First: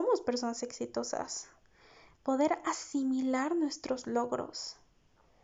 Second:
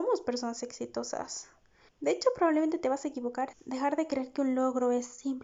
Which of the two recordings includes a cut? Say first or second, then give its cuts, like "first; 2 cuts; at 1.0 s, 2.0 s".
second; 2 cuts; at 1.9 s, 3.5 s